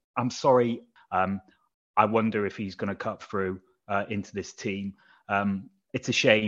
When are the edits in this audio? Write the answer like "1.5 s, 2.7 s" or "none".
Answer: 1.0 s